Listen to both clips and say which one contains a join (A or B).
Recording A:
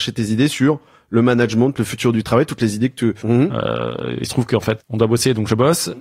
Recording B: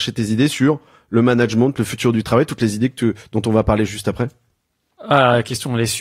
A